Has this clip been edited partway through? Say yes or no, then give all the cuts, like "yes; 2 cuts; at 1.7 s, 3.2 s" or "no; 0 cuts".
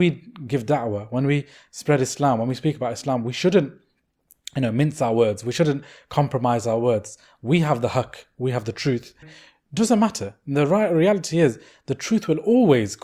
yes; 1 cut; at 9.2 s